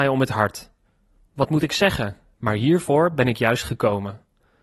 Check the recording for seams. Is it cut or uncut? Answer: cut